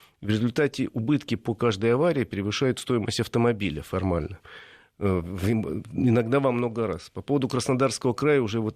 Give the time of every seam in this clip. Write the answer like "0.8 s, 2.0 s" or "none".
none